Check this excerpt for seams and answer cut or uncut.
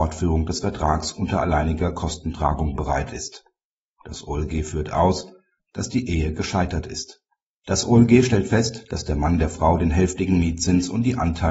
cut